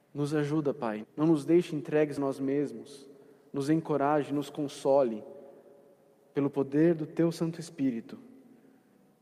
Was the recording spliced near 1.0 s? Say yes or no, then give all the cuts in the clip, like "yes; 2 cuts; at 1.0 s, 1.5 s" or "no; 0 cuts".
yes; 1 cut; at 1.0 s